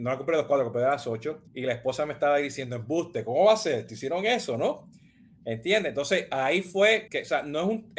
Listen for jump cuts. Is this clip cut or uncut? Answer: cut